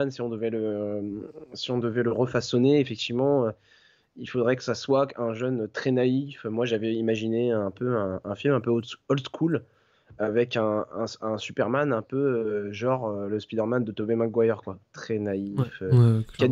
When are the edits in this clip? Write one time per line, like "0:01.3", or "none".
none